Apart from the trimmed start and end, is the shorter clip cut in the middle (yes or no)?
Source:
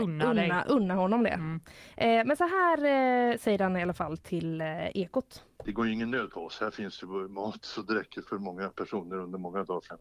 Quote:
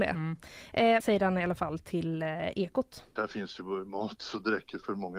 yes